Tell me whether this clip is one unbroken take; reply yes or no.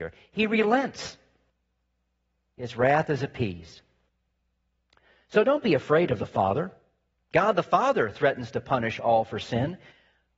no